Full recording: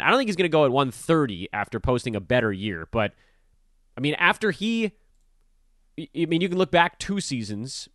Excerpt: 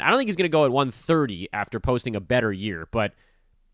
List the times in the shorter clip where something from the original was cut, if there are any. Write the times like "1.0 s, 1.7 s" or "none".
none